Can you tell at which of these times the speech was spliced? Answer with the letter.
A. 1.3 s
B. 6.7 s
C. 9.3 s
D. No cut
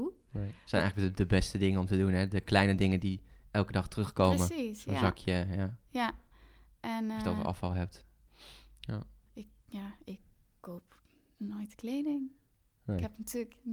C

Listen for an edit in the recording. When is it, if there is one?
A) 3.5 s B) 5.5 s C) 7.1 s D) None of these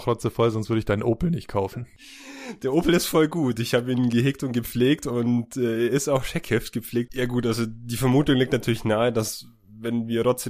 C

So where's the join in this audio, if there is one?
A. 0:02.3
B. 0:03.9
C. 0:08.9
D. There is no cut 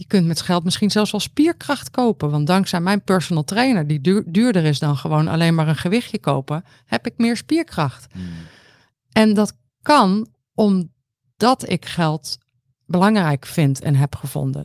D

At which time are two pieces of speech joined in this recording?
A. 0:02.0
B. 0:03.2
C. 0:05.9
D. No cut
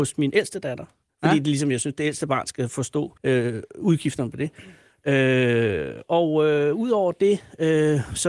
B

